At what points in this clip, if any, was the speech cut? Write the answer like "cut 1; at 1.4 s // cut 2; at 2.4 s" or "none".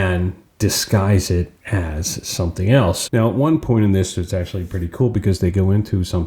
cut 1; at 3.1 s

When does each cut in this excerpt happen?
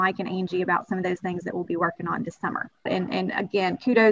cut 1; at 2.9 s

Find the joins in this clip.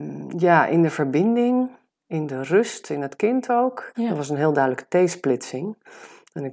cut 1; at 1.9 s // cut 2; at 3.9 s

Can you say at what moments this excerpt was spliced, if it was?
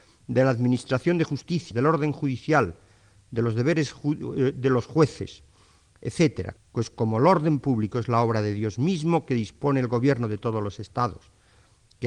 cut 1; at 1.7 s // cut 2; at 6.6 s

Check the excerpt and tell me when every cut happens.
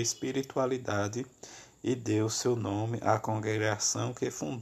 none

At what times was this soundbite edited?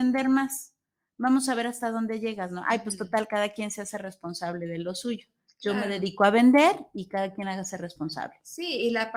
none

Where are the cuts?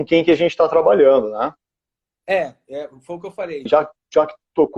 cut 1; at 3.7 s

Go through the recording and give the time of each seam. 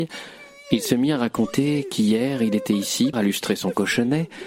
cut 1; at 3.1 s

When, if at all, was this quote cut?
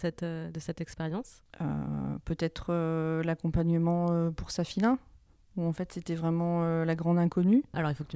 none

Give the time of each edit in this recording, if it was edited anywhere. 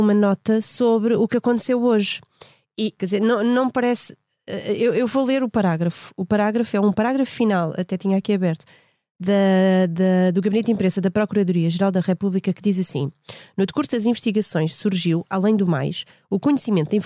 cut 1; at 3.0 s

